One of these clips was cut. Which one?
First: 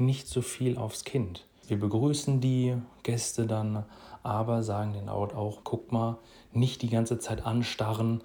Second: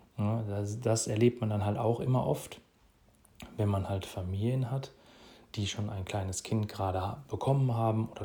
first; 2 cuts; at 1.6 s, 5.6 s

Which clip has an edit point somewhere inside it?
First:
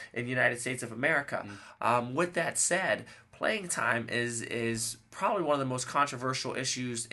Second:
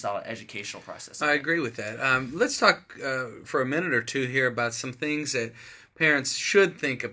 second; 1 cut; at 3.4 s

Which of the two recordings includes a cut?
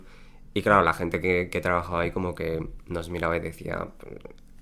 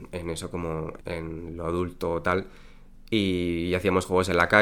second; 1 cut; at 1.0 s

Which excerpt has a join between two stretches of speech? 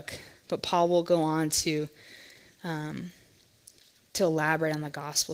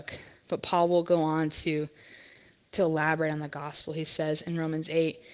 second; 1 cut; at 2.6 s

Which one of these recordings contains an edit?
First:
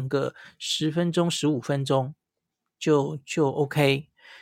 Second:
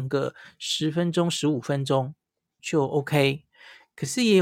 second; 1 cut; at 2.6 s

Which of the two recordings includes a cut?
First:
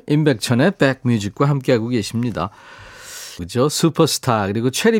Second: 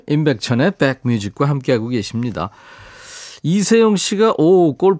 first; 1 cut; at 3.4 s

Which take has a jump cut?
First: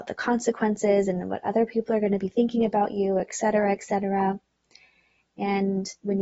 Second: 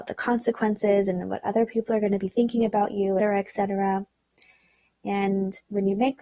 second; 1 cut; at 3.2 s

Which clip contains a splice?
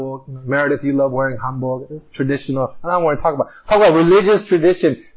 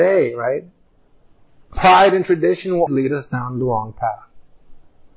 second; 1 cut; at 2.9 s

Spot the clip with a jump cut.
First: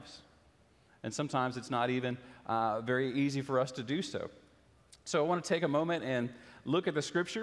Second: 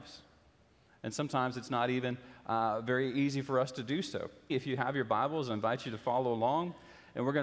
second; 1 cut; at 4.5 s

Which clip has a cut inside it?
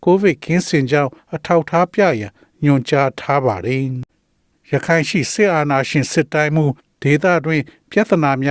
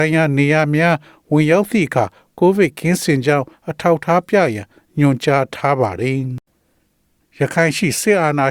first; 1 cut; at 4.1 s

